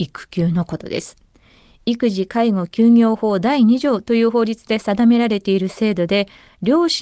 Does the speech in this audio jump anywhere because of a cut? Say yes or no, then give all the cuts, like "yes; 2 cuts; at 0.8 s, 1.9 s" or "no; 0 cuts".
no; 0 cuts